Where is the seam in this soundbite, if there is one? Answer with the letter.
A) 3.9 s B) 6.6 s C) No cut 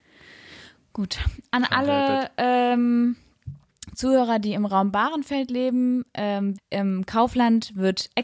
B